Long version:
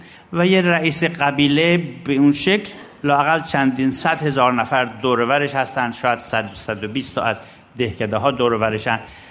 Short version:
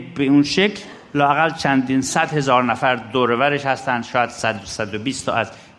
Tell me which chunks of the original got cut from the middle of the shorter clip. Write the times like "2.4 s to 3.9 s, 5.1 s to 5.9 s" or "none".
none